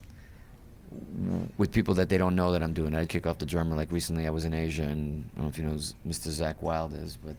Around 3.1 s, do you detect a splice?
yes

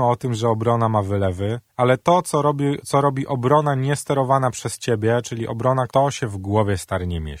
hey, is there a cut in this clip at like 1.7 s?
yes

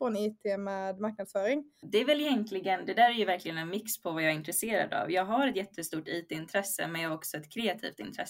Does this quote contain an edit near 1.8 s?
yes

